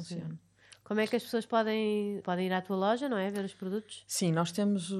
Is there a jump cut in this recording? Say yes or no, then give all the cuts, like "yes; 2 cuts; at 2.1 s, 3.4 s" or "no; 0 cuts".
yes; 1 cut; at 2.2 s